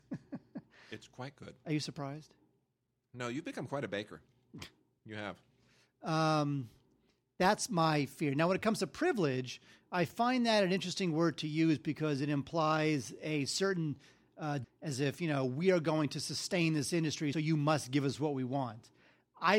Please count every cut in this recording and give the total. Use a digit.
2